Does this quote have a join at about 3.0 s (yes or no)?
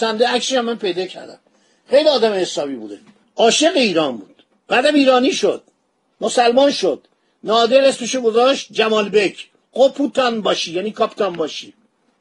no